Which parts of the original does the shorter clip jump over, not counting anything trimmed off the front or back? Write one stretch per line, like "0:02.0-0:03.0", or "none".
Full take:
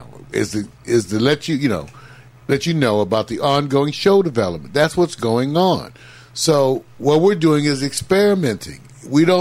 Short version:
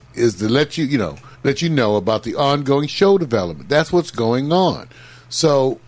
0:02.0-0:02.4